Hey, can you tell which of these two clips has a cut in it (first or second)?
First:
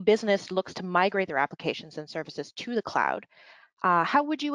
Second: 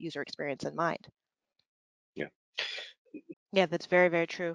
second